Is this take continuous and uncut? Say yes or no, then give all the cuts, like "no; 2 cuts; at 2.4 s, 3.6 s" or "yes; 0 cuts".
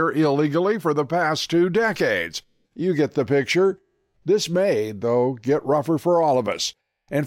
no; 2 cuts; at 2.6 s, 4.1 s